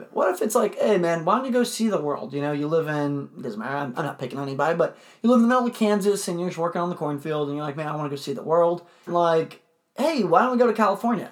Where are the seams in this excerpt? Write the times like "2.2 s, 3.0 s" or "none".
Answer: 9.1 s